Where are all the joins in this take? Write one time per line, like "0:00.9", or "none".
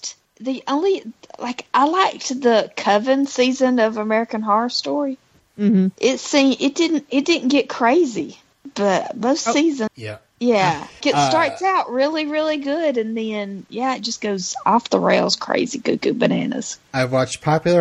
0:09.9
0:11.0